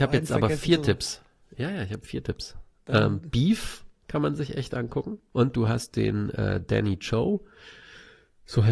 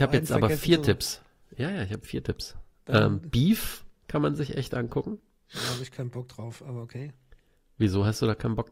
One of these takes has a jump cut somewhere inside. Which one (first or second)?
first